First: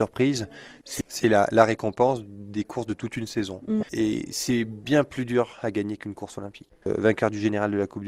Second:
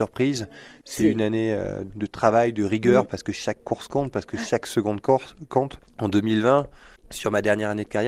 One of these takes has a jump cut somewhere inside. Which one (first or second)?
first